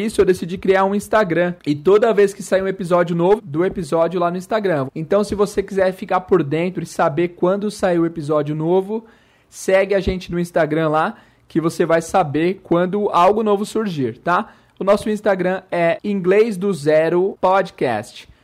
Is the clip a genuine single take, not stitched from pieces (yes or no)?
no